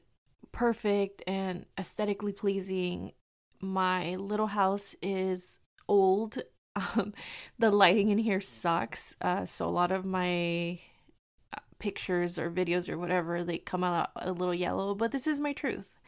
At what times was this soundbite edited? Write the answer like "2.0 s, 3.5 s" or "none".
none